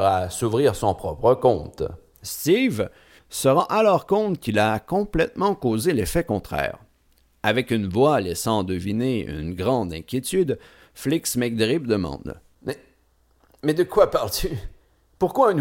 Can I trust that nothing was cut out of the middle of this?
no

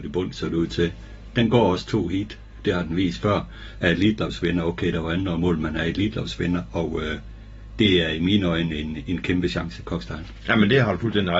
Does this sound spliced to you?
no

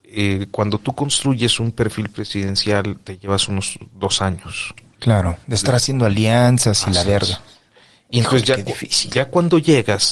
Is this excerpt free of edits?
yes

